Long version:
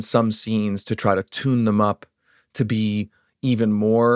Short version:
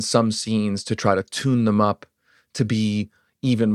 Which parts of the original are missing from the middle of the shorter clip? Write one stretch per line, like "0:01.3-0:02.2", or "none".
none